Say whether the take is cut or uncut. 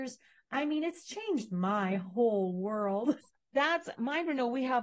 cut